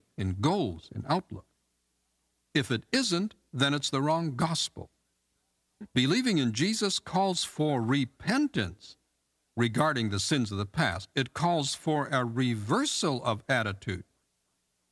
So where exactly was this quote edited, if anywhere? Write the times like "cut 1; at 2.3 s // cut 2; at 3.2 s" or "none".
cut 1; at 2.5 s